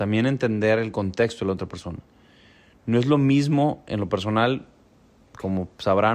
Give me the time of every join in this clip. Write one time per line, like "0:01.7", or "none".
none